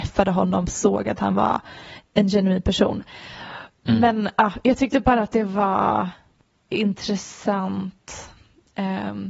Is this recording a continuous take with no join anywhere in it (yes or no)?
no